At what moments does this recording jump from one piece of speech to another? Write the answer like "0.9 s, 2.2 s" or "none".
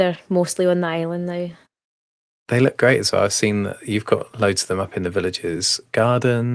none